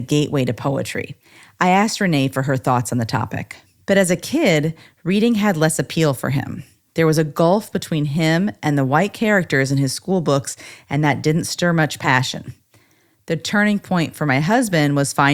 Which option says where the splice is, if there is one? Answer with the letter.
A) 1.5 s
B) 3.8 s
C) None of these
B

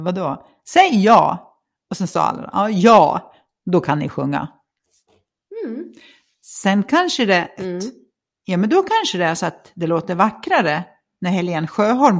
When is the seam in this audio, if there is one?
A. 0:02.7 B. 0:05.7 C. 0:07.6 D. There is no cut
C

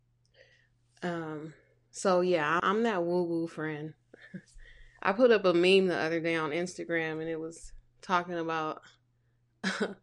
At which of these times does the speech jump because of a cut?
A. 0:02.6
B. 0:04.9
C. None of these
A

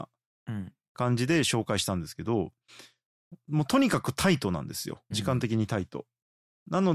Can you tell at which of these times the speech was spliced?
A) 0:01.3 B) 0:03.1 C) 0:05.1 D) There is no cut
C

